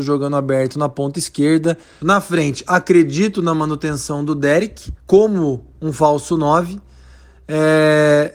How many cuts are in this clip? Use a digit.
2